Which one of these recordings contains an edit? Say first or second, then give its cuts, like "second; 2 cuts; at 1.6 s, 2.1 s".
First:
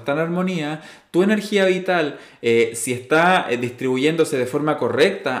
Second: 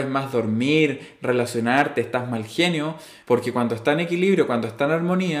second; 1 cut; at 3.2 s